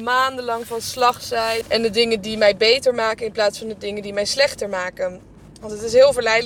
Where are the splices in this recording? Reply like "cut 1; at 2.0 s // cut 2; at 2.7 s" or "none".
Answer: cut 1; at 1.6 s

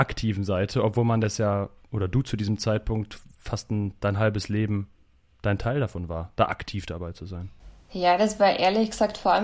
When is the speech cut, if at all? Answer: none

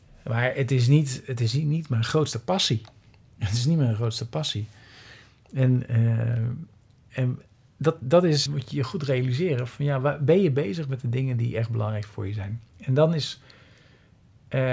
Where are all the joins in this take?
cut 1; at 8.5 s // cut 2; at 12.7 s

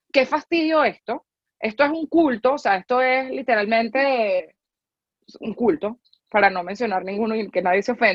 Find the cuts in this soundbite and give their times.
none

